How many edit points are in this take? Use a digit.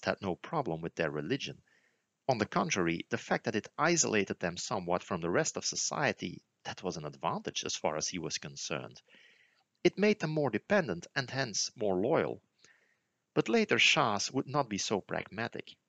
0